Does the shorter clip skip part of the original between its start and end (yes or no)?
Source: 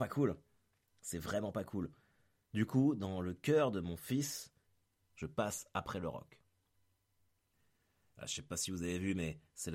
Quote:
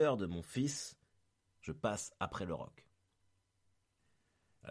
no